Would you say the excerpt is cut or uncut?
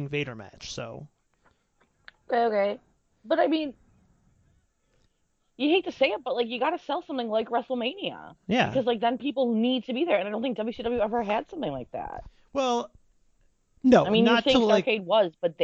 uncut